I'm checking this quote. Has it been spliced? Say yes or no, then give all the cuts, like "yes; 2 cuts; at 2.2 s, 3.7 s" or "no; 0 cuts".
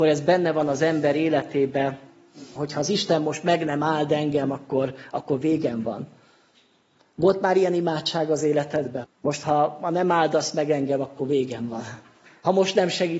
yes; 2 cuts; at 2.6 s, 9.0 s